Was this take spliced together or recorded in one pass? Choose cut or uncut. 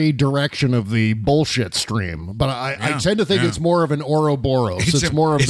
uncut